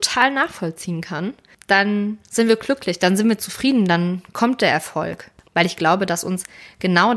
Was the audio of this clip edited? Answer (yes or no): yes